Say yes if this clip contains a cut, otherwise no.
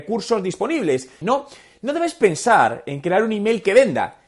yes